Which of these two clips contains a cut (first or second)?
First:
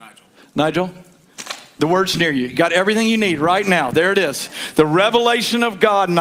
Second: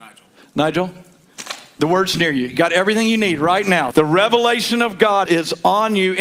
second